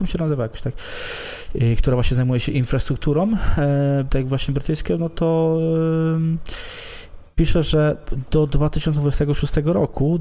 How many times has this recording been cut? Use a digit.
1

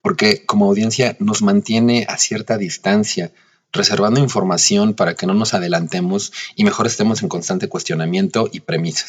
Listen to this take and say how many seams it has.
0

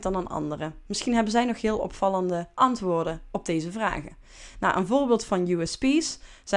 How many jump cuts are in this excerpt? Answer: 0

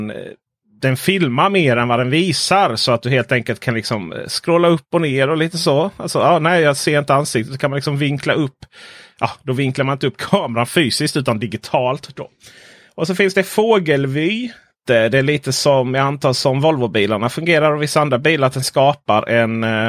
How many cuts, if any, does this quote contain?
0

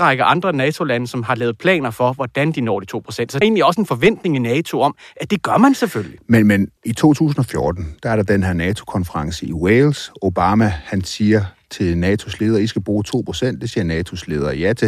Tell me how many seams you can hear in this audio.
2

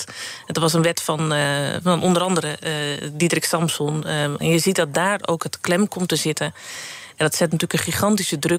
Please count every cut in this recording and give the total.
2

